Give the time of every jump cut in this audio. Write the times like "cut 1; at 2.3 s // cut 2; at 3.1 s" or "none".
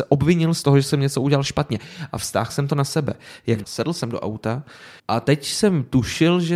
cut 1; at 3.6 s // cut 2; at 5.0 s